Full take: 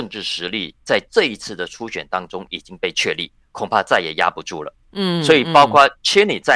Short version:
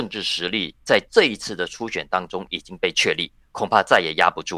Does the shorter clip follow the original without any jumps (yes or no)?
yes